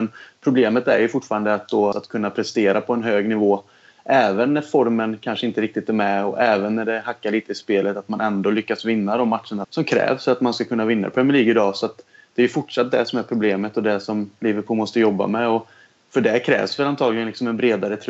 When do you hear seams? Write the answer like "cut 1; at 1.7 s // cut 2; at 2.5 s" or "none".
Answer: cut 1; at 1.9 s // cut 2; at 9.6 s